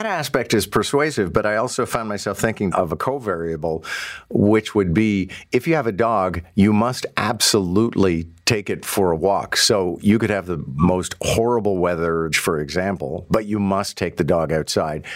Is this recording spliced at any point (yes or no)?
yes